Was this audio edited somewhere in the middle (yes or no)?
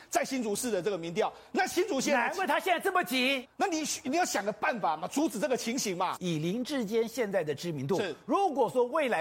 yes